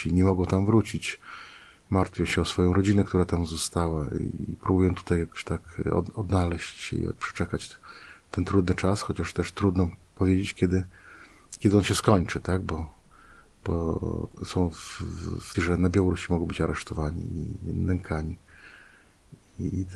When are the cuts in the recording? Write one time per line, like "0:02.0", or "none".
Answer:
0:14.3
0:15.5